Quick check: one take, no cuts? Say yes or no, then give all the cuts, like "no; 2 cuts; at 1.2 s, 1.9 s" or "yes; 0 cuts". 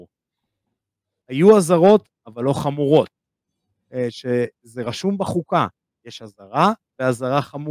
no; 1 cut; at 1.2 s